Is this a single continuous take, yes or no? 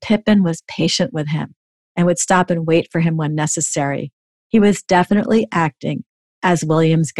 yes